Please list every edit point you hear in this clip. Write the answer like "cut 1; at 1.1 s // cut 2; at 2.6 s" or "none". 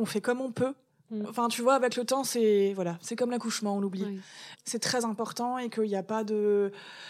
cut 1; at 1.2 s // cut 2; at 4.5 s